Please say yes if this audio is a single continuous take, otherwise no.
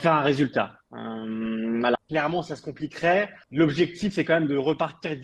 no